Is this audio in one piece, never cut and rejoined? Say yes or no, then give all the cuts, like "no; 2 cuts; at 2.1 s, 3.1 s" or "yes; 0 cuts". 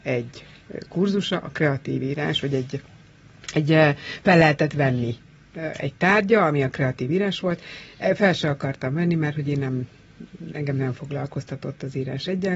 yes; 0 cuts